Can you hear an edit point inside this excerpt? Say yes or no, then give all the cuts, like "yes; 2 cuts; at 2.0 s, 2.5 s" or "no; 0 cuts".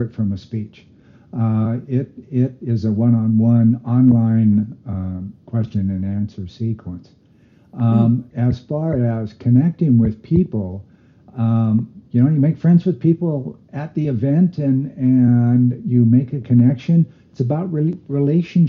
no; 0 cuts